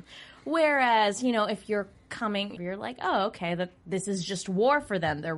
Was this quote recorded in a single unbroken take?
no; 1 cut; at 2.6 s

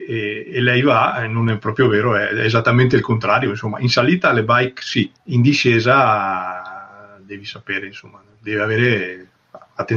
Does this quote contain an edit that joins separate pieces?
yes; 1 cut; at 5.2 s

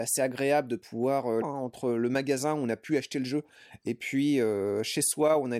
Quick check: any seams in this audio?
yes; 1 cut; at 1.4 s

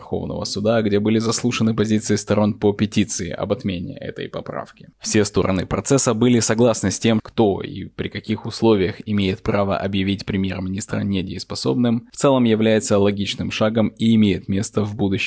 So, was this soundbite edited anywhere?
yes; 2 cuts; at 4.9 s, 7.2 s

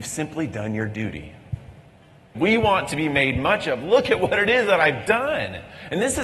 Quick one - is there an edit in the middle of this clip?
yes; 1 cut; at 2.3 s

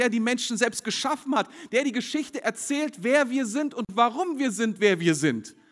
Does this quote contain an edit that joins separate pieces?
no; 0 cuts

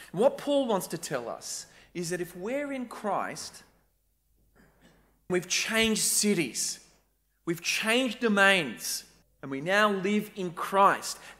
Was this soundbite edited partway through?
yes; 2 cuts; at 5.3 s, 9.2 s

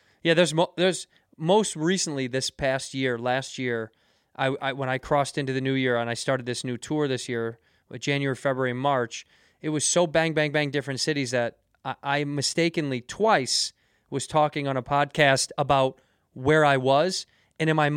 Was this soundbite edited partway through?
no; 0 cuts

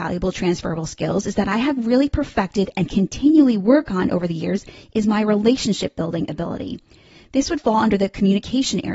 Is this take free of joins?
yes; 0 cuts

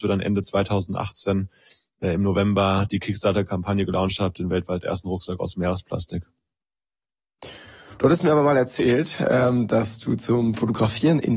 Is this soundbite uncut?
no; 1 cut; at 8.0 s

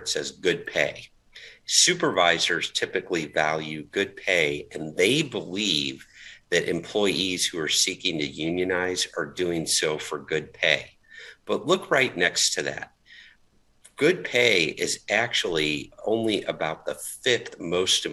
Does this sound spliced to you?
no; 0 cuts

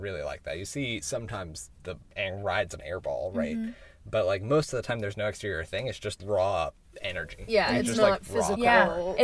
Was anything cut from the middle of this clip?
no; 0 cuts

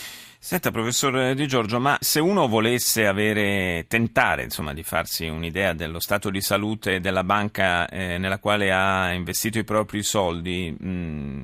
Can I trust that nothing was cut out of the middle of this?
no; 1 cut; at 2.0 s

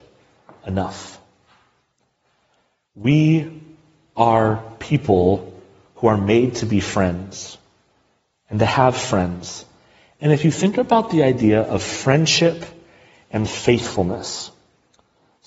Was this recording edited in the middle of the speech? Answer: no; 0 cuts

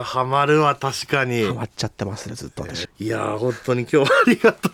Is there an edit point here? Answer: yes; 1 cut; at 2.9 s

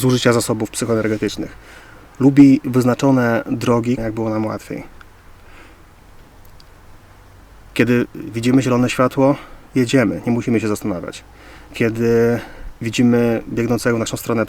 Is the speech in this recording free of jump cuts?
no; 1 cut; at 4.0 s

